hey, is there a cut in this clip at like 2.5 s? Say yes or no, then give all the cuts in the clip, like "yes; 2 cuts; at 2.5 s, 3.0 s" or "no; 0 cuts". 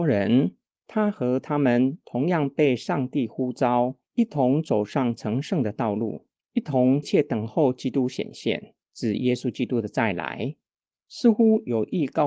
no; 3 cuts; at 7.0 s, 8.8 s, 10.9 s